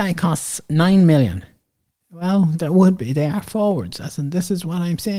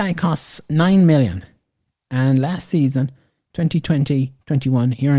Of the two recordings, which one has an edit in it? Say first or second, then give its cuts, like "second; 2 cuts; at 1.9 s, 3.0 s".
first; 1 cut; at 2.0 s